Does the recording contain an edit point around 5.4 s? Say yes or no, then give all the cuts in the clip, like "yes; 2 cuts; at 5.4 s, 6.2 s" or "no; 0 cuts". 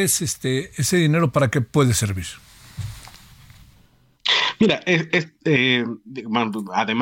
no; 0 cuts